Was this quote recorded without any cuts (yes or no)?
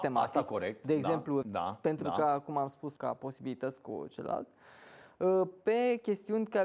no